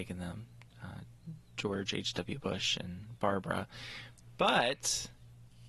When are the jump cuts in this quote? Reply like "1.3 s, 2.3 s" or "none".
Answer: none